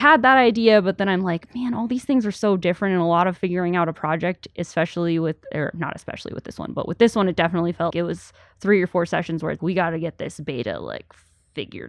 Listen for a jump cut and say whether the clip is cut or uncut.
cut